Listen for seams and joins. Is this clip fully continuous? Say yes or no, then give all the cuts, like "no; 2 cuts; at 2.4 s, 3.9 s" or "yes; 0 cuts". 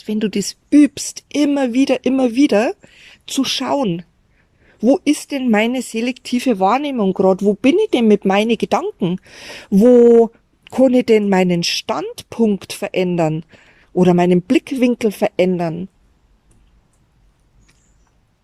yes; 0 cuts